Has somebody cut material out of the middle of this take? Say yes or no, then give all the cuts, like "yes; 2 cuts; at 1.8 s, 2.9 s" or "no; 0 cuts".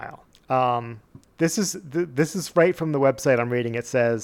no; 0 cuts